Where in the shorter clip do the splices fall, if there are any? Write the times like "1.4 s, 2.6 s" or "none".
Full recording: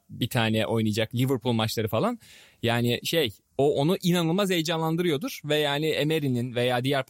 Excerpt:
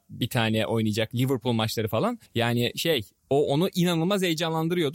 2.3 s